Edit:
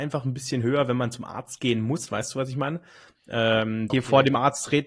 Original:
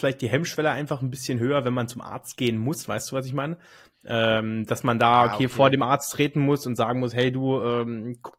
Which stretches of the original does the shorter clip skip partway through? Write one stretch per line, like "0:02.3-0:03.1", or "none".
0:04.7-0:05.4